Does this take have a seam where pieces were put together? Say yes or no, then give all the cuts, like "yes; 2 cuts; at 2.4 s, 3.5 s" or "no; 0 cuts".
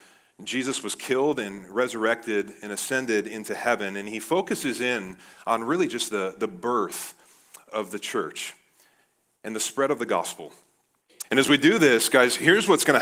yes; 1 cut; at 11.2 s